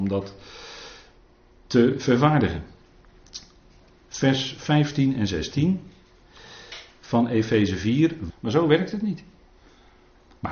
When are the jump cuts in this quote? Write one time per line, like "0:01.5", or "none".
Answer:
0:08.3